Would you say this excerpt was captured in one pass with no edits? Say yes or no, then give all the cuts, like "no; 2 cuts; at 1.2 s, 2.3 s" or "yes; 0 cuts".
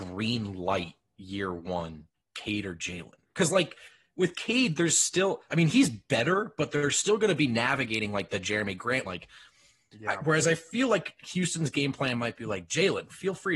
no; 1 cut; at 9.0 s